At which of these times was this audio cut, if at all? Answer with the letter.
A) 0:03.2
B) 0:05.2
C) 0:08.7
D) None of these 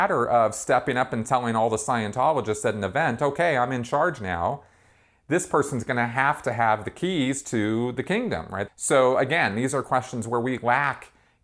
C